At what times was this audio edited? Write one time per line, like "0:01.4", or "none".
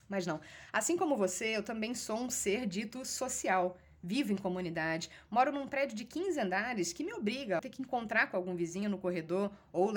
0:07.6